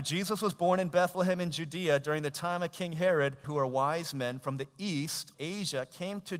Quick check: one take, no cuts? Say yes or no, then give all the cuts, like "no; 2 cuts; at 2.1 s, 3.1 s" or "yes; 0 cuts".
no; 2 cuts; at 3.4 s, 5.3 s